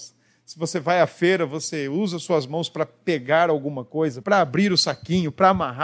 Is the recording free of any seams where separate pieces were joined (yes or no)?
no